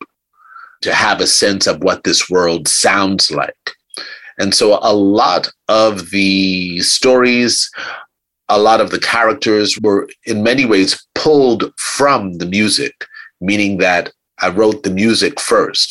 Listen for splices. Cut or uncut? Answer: cut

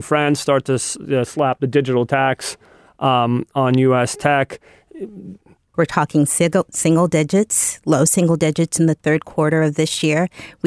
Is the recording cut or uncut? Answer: cut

